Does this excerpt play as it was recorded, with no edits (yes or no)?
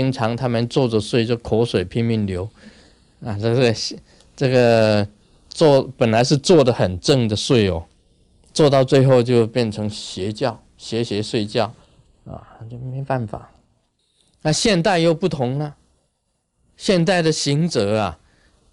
yes